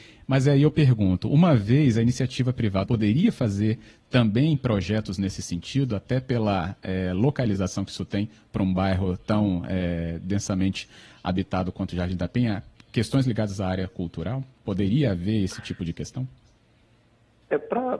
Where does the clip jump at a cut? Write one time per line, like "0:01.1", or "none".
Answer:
0:02.8